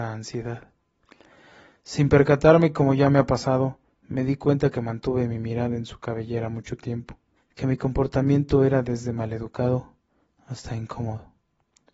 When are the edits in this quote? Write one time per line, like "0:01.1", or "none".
0:07.4